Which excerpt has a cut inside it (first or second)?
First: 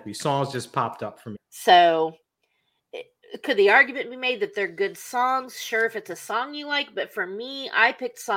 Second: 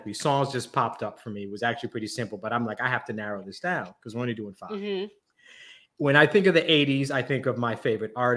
first